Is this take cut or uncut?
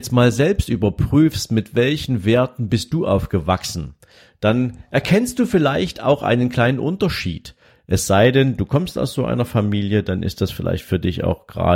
uncut